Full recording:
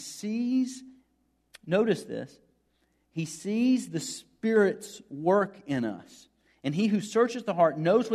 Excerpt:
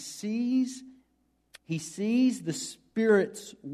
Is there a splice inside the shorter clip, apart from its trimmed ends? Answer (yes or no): yes